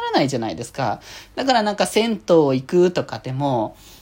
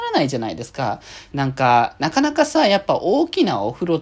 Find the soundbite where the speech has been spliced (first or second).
second